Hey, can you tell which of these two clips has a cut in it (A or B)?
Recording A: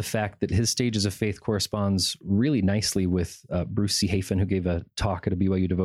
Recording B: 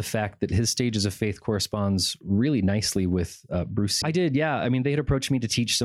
B